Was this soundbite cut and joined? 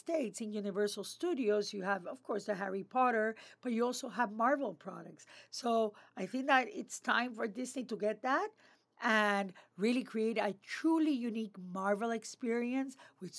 no; 0 cuts

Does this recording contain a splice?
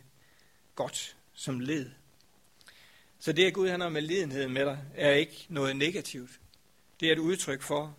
no; 0 cuts

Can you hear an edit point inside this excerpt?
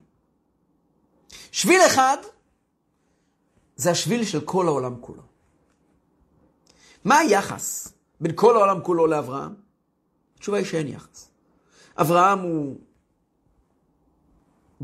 no; 0 cuts

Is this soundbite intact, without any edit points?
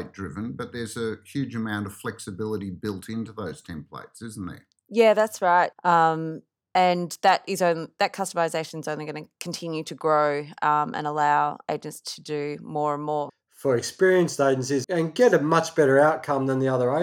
no; 3 cuts; at 5.7 s, 13.3 s, 14.8 s

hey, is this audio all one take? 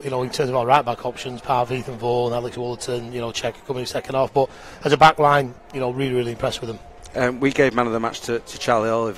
yes; 0 cuts

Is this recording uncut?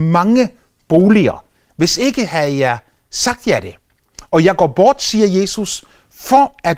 yes; 0 cuts

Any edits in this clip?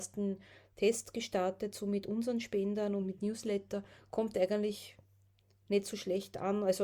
no; 0 cuts

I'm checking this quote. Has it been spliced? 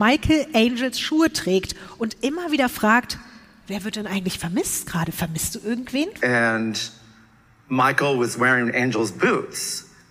yes; 1 cut; at 6.2 s

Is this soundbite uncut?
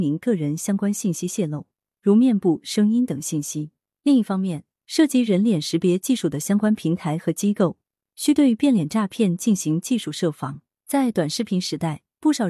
no; 1 cut; at 10.7 s

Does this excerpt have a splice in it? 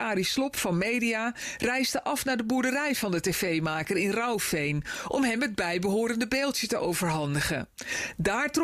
no; 0 cuts

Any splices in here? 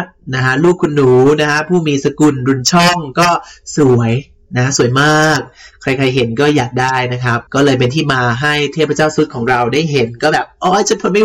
yes; 1 cut; at 7.5 s

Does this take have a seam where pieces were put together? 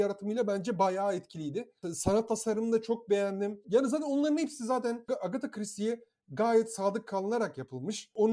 yes; 1 cut; at 3.6 s

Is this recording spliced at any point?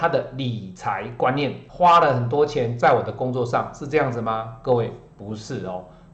yes; 1 cut; at 1.7 s

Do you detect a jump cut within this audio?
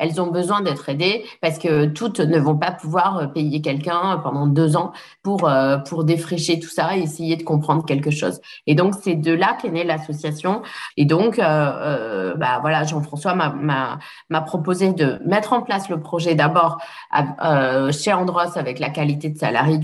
yes; 1 cut; at 10.9 s

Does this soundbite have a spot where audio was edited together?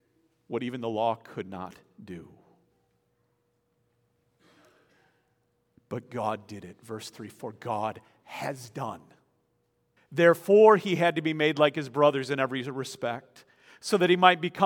yes; 1 cut; at 10.0 s

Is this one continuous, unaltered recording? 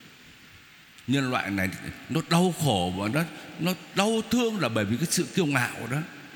yes; 0 cuts

